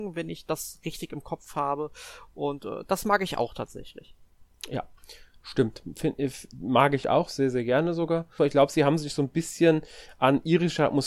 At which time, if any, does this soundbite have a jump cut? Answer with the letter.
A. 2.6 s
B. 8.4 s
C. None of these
B